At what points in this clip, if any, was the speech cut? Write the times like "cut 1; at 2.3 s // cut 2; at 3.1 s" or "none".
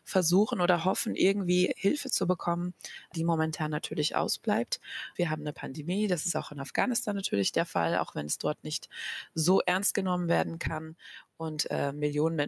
cut 1; at 5.2 s